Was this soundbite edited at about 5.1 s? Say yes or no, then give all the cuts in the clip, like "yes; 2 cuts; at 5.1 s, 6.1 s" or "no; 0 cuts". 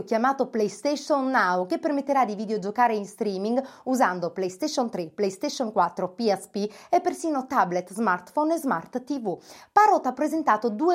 no; 0 cuts